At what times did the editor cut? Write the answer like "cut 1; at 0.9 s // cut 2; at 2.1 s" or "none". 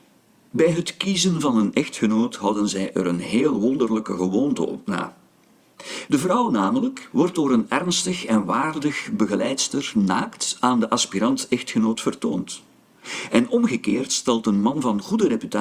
cut 1; at 6.1 s // cut 2; at 7.1 s